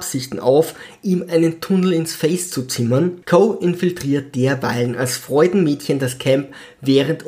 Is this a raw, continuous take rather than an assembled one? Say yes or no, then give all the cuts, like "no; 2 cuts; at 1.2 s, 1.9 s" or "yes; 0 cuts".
no; 1 cut; at 3.2 s